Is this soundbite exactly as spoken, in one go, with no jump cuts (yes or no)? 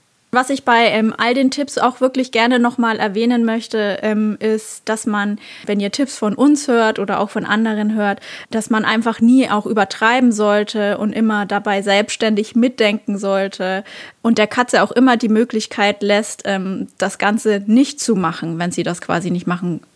yes